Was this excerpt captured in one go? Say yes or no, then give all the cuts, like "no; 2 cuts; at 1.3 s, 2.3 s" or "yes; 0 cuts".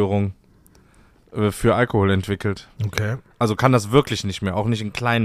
no; 1 cut; at 2.8 s